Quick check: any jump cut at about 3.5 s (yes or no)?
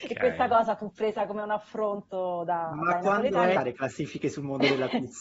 yes